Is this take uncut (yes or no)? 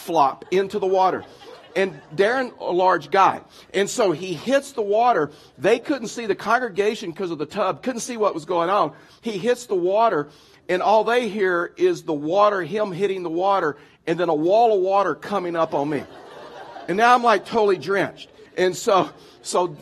no